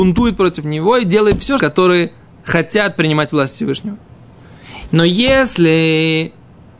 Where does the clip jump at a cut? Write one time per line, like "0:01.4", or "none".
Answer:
0:01.6
0:04.9